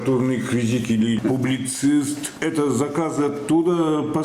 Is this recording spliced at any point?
no; 0 cuts

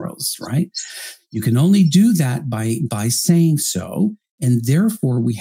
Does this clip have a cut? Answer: no; 0 cuts

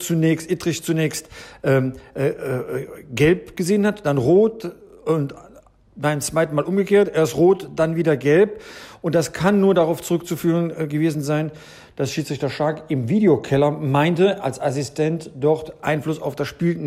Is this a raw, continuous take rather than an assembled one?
yes; 0 cuts

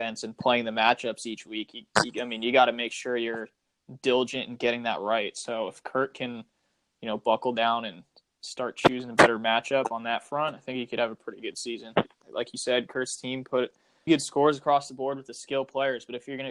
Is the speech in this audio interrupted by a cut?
yes; 2 cuts; at 12.2 s, 14.1 s

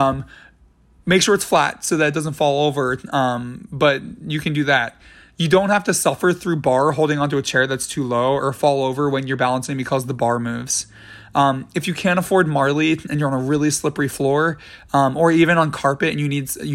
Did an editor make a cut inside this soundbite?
no; 0 cuts

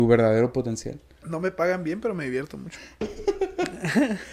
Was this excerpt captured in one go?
no; 1 cut; at 1.2 s

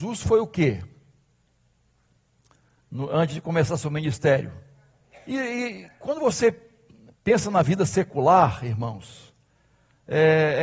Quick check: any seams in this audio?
yes; 1 cut; at 5.1 s

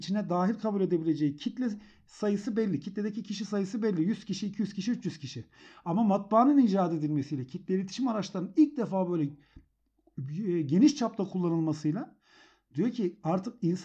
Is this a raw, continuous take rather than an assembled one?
yes; 0 cuts

